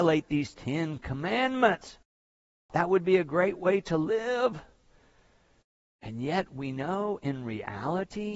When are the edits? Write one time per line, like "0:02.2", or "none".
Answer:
0:02.7